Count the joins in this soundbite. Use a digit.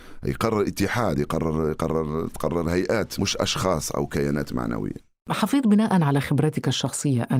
0